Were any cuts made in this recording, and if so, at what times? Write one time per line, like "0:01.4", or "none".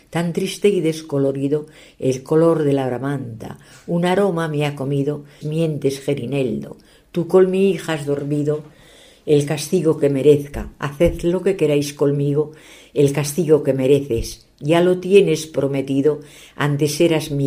0:05.4